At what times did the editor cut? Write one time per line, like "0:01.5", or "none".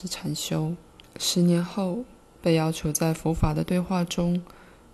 0:01.0
0:02.2